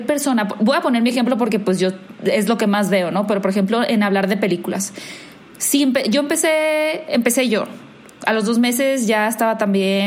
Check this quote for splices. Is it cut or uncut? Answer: uncut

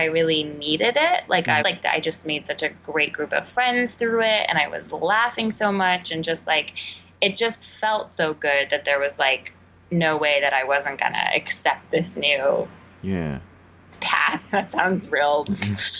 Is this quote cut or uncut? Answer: cut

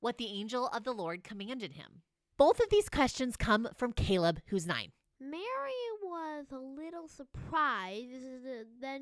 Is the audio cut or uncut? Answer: cut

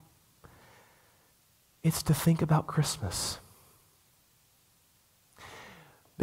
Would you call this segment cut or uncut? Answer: uncut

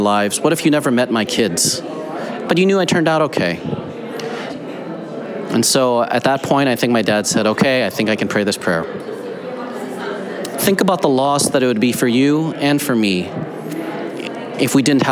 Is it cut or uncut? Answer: cut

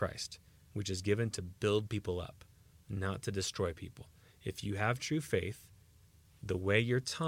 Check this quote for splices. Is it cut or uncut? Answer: uncut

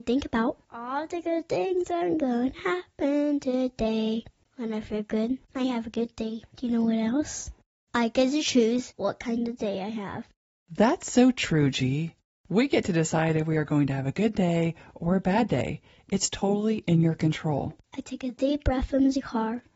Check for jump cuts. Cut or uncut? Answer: cut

